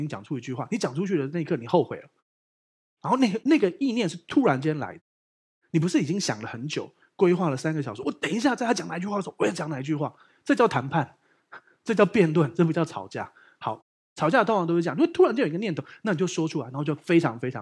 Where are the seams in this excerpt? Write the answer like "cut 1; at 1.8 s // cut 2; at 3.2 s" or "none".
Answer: cut 1; at 3.4 s